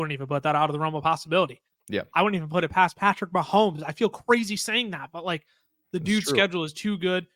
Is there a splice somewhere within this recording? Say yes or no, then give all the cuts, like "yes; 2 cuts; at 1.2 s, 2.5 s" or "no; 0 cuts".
no; 0 cuts